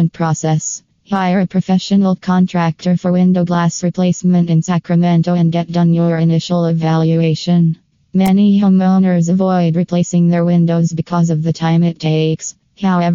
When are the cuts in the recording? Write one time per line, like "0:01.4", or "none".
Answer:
none